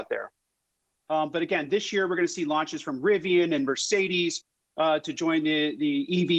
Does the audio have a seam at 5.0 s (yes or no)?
no